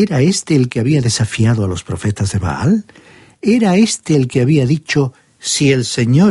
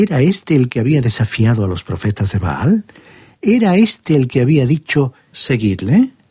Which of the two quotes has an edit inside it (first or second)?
second